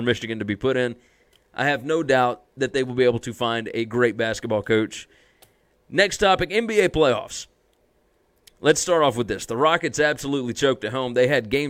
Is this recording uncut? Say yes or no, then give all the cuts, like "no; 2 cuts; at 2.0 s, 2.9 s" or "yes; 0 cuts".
yes; 0 cuts